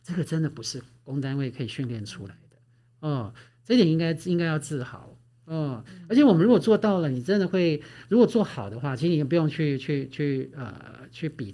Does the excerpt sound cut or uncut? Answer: uncut